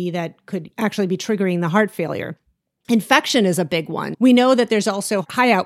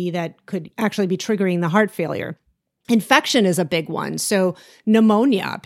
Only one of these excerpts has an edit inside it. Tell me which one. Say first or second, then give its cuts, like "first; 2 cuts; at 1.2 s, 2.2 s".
first; 1 cut; at 4.1 s